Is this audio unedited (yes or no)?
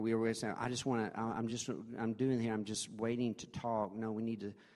yes